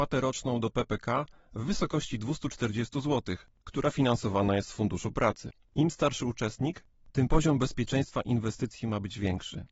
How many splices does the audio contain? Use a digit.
1